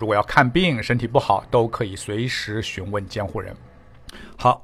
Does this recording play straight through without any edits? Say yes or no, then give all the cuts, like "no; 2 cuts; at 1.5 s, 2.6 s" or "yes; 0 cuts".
yes; 0 cuts